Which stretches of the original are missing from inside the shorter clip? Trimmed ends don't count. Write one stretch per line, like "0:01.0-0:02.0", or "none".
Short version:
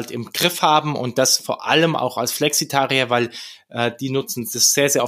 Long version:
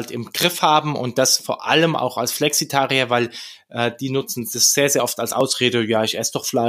none

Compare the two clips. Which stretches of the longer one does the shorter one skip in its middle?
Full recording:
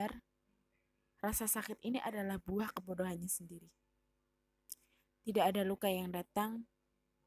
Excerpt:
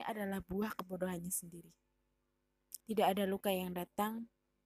0:04.8-0:05.2

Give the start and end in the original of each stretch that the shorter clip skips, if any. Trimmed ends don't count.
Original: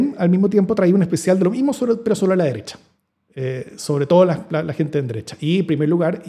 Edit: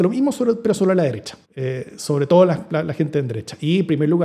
0:02.9-0:03.2

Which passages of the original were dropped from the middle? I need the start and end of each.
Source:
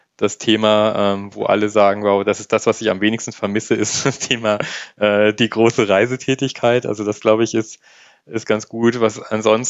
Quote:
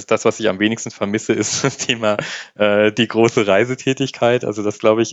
none

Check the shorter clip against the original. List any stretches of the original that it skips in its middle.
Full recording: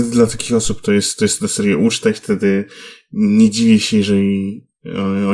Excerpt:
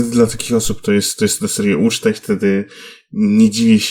none

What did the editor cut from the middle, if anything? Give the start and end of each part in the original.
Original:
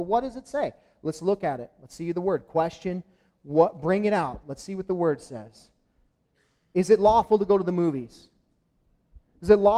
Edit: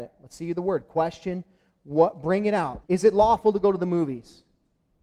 0:04.4-0:06.7

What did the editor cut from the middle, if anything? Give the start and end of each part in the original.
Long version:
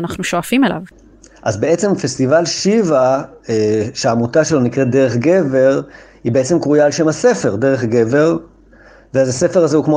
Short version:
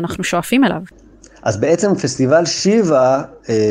none

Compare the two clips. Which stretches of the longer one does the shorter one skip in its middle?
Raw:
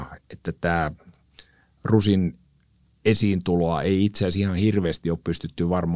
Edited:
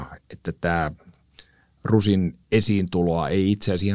0:02.4-0:03.0

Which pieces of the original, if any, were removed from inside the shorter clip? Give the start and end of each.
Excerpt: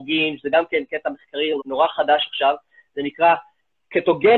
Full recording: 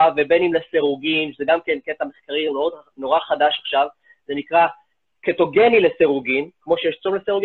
0:02.5-0:02.9

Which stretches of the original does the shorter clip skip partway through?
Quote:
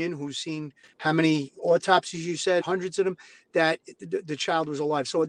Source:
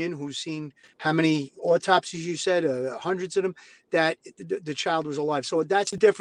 0:02.6-0:03.0

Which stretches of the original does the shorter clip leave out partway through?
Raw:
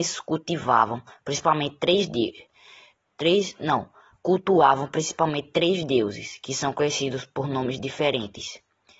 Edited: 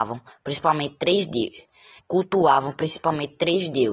0:02.8-0:04.1

